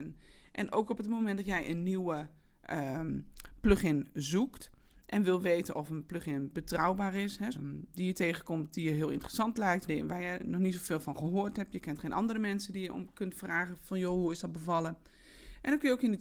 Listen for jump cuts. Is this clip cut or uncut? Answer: cut